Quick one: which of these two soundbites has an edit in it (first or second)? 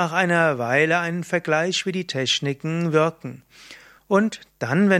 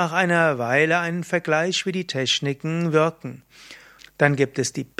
second